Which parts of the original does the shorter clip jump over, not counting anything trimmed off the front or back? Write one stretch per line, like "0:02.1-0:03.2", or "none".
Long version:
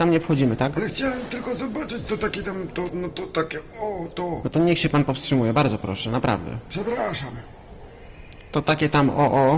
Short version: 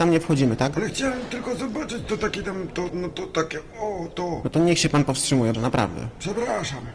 0:05.5-0:06.0